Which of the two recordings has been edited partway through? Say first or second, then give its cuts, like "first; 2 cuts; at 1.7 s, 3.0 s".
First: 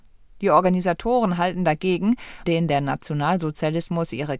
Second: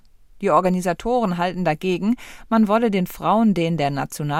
first; 1 cut; at 2.5 s